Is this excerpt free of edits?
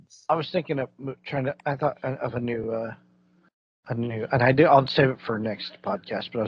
yes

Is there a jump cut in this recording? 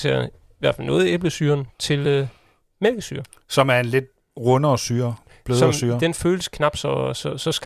no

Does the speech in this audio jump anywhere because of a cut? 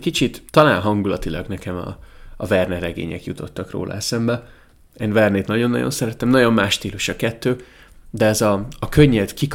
no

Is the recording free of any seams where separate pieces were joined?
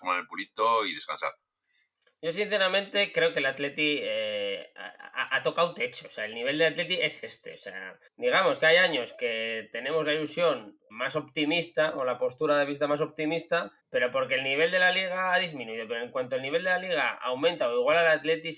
no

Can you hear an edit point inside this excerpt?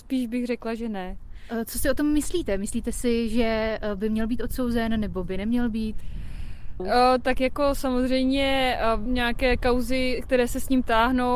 yes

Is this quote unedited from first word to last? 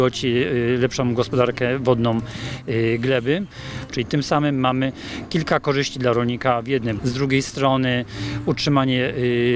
no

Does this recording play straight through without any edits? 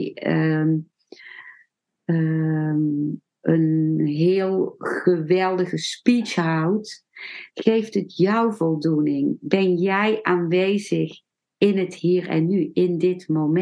no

